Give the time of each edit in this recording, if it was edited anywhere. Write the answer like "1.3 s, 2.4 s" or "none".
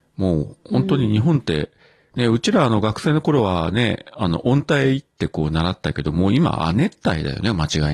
none